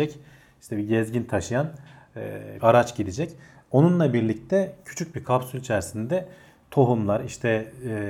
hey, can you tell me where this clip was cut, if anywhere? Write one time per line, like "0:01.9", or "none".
0:02.6